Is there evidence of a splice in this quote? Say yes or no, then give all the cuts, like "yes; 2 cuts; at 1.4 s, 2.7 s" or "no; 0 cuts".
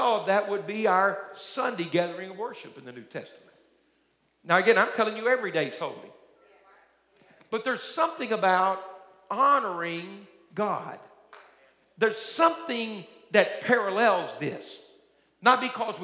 no; 0 cuts